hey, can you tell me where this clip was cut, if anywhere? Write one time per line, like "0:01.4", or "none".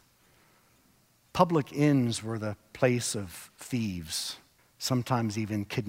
0:04.6